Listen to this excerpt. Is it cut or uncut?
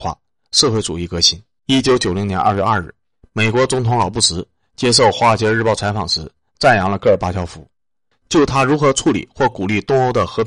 cut